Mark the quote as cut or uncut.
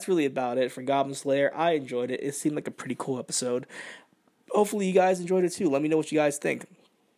uncut